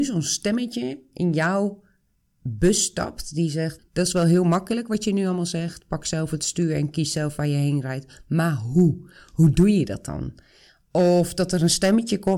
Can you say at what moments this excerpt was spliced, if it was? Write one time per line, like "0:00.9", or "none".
0:03.8

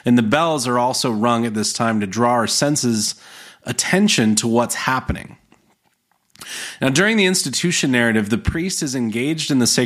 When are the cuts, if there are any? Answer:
none

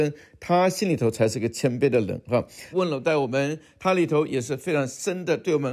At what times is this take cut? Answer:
0:02.7

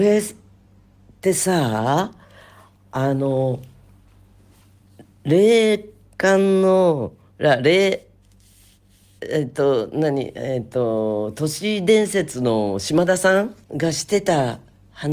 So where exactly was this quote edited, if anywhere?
0:13.6

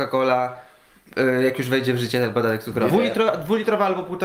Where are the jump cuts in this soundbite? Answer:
0:02.9

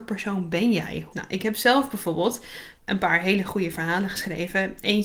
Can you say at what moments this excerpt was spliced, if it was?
0:01.1
0:02.8

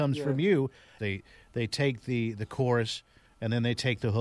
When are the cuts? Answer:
0:01.0

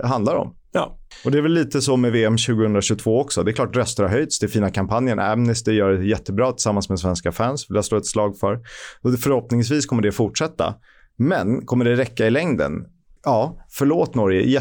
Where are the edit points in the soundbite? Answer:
0:13.2

